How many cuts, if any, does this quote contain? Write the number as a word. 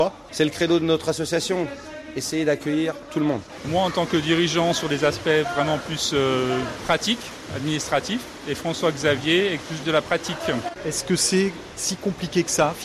one